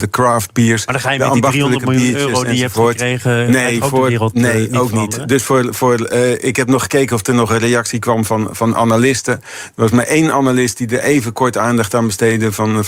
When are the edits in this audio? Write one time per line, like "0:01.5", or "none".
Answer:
none